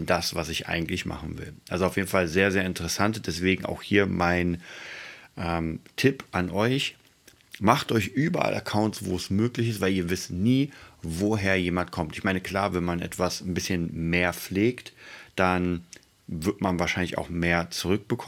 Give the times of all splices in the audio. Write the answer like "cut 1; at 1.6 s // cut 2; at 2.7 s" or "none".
none